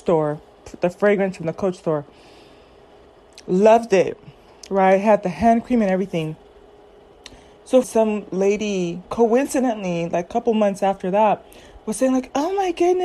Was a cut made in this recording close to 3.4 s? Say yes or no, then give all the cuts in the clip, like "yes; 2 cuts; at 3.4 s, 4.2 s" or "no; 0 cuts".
no; 1 cut; at 7.8 s